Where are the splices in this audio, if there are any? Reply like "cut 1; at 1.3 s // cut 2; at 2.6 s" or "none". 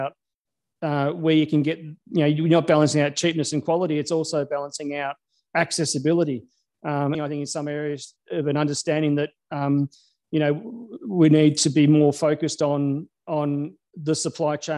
cut 1; at 7.1 s

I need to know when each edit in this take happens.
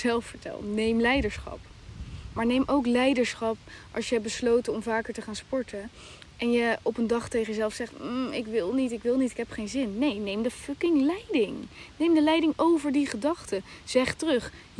none

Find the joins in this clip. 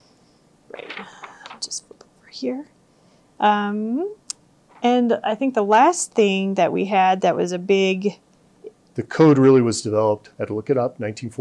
cut 1; at 8.9 s

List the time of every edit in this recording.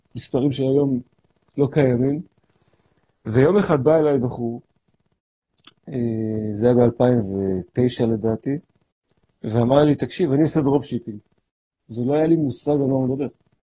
none

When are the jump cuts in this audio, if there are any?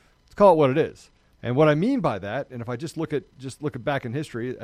cut 1; at 1.4 s

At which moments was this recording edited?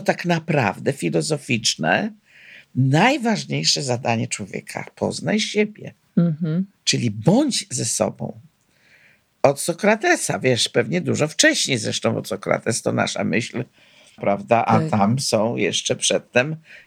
cut 1; at 14.2 s

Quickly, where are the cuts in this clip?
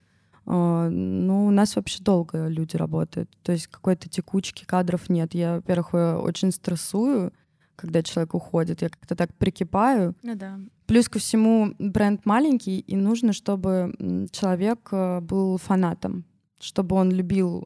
none

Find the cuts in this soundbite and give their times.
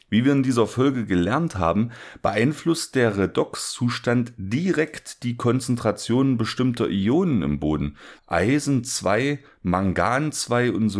cut 1; at 8.2 s

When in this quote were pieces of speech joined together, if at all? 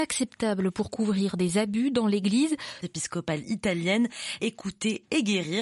cut 1; at 2.8 s // cut 2; at 4.4 s

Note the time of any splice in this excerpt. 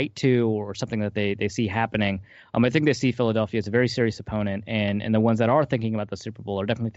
none

